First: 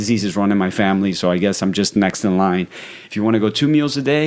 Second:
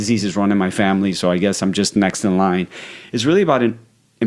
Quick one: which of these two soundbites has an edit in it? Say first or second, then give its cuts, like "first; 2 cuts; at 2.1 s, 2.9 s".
first; 1 cut; at 3.1 s